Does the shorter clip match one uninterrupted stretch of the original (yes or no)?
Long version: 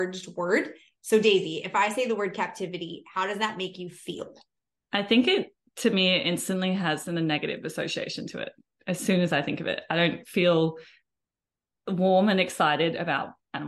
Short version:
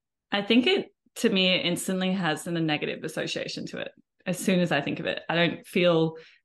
yes